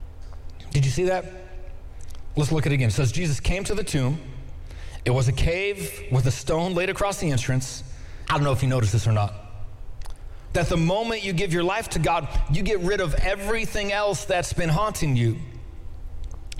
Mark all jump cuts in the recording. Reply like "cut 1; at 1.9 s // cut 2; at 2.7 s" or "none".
cut 1; at 8.3 s // cut 2; at 10.5 s